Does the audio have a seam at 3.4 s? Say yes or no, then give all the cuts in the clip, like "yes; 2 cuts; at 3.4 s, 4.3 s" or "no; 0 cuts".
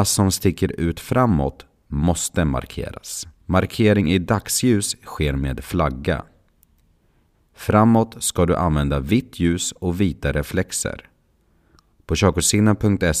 yes; 3 cuts; at 3.4 s, 7.3 s, 11.9 s